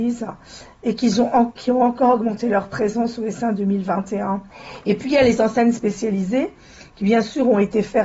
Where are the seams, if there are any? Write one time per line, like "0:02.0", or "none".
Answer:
none